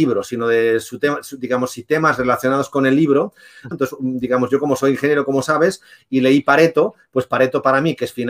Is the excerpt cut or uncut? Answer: cut